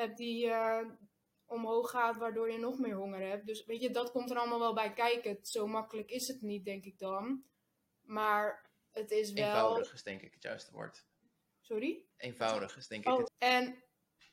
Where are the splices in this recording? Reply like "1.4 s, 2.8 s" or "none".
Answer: 12.1 s, 13.3 s